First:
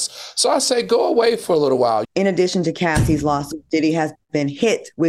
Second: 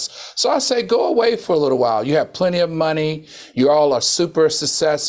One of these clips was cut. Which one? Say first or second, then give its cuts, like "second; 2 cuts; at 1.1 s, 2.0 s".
first; 1 cut; at 2.0 s